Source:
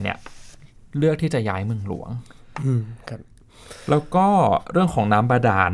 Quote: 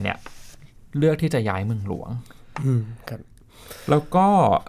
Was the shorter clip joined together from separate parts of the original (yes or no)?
no